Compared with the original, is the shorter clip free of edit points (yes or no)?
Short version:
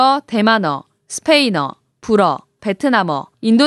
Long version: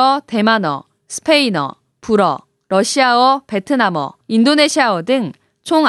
no